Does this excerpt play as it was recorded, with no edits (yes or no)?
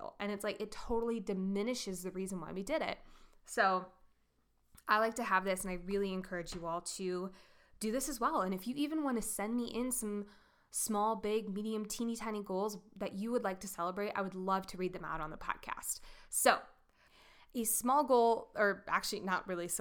yes